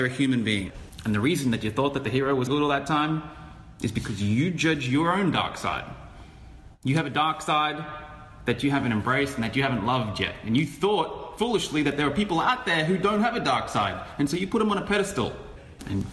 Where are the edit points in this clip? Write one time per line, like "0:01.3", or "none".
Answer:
0:02.5